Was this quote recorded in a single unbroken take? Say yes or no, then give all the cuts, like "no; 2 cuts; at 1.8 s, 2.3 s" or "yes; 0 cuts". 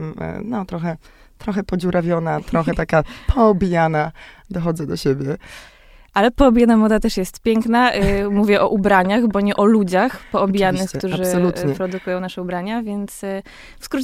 yes; 0 cuts